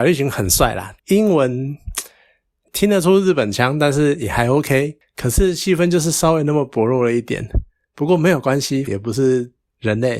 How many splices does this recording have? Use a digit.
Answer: 2